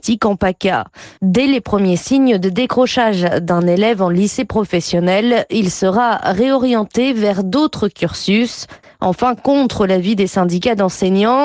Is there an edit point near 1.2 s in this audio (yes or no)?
yes